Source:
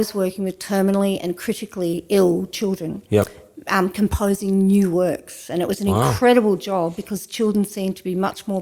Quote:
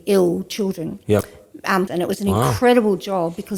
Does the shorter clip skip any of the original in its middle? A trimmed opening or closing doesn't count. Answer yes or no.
yes